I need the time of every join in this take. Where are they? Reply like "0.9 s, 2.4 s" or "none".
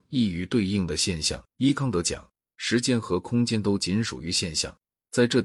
1.5 s